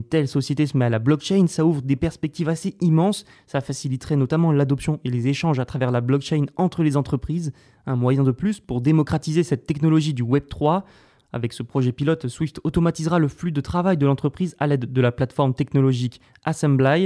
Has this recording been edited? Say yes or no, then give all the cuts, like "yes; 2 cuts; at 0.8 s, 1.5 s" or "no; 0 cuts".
no; 0 cuts